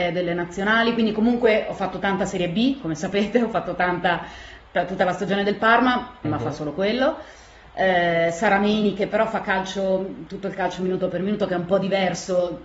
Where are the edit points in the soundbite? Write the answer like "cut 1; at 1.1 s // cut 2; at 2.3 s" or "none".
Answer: cut 1; at 6.2 s